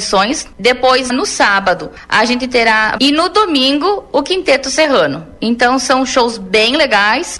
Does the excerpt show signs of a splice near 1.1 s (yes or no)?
yes